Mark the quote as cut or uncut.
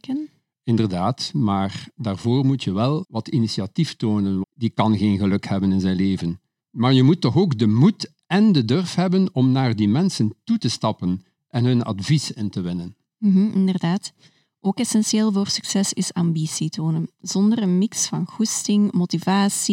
cut